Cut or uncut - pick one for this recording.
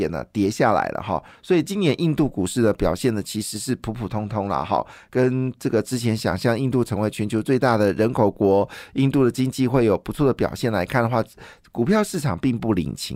uncut